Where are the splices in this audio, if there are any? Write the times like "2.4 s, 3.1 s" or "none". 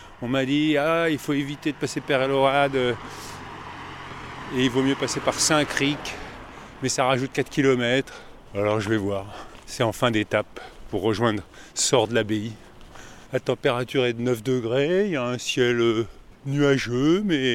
13.3 s

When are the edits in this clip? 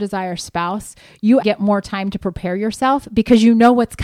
1.4 s

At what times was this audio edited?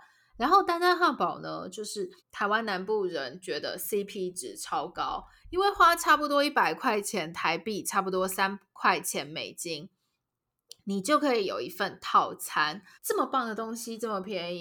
2.2 s, 12.9 s

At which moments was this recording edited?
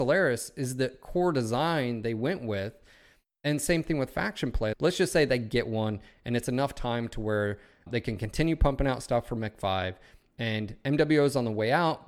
4.7 s, 7.9 s

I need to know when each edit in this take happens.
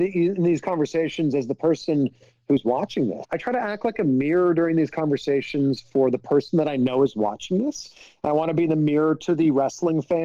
3.2 s

